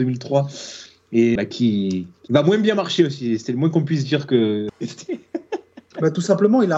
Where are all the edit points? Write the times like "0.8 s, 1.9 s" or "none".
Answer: 1.4 s, 4.7 s